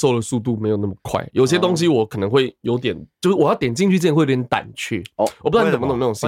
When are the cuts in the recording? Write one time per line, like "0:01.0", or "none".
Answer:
none